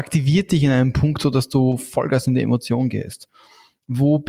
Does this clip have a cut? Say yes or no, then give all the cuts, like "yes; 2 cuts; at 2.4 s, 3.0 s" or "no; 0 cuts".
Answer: no; 0 cuts